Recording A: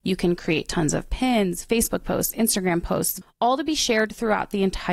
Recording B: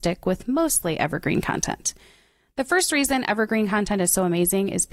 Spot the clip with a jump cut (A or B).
A